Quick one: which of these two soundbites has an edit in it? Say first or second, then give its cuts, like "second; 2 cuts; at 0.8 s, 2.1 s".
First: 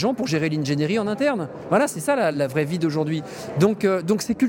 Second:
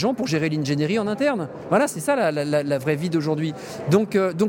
first; 1 cut; at 2.3 s